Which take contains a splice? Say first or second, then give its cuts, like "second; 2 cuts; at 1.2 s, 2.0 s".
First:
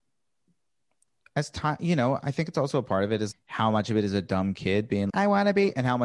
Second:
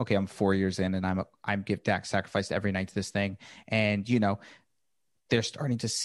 first; 2 cuts; at 3.3 s, 5.1 s